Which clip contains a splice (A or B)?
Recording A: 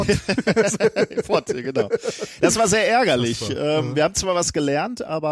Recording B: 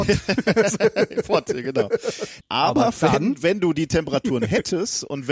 B